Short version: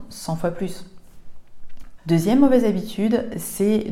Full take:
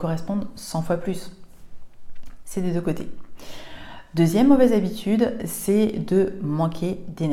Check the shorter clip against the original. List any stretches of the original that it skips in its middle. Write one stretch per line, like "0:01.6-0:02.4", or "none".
0:02.4-0:04.1